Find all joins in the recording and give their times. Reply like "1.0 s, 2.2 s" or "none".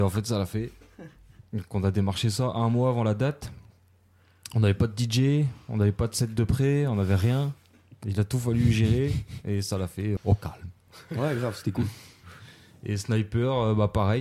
10.2 s